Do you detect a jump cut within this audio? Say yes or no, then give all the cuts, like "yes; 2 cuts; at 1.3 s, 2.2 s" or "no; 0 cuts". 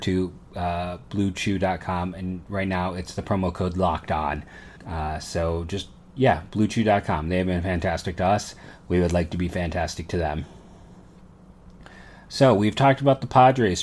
yes; 1 cut; at 4.8 s